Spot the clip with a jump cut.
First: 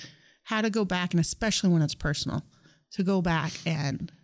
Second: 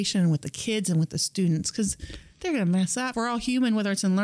second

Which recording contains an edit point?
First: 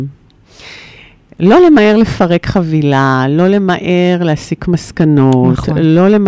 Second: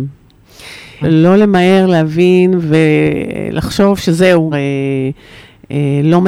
second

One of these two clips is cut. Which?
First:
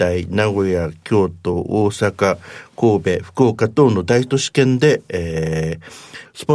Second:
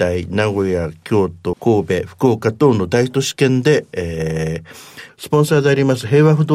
second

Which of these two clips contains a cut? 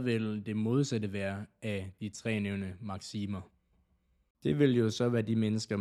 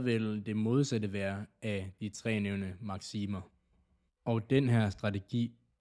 second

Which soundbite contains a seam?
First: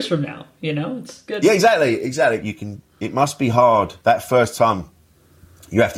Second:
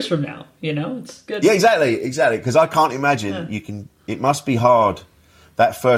first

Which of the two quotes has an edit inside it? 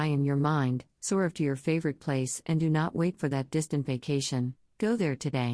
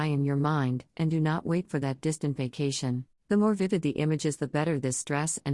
second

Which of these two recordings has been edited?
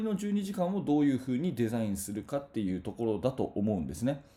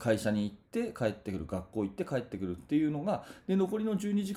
second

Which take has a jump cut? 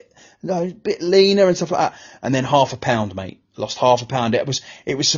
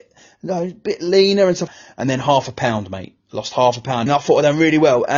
second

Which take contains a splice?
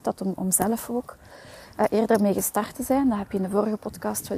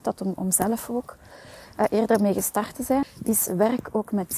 second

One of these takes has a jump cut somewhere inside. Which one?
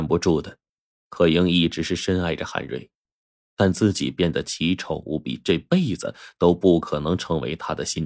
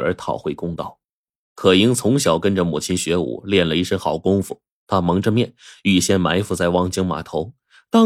second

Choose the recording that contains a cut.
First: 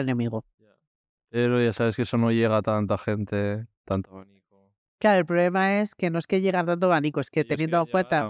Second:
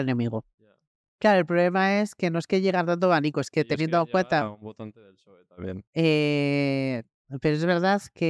second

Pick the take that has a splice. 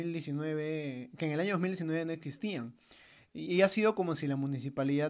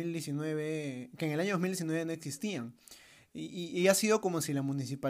first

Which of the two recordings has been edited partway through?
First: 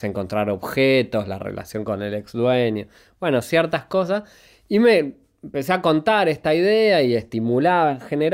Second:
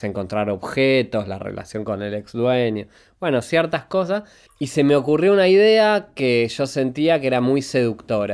second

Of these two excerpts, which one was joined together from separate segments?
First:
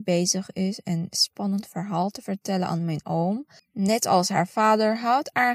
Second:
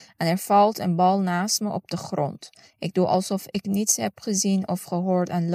first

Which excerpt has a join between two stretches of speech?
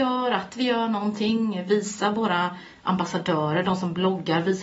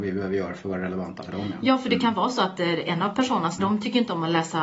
second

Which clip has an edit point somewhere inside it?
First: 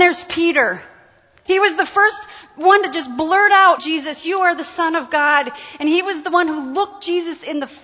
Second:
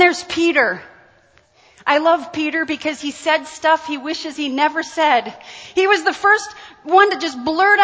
first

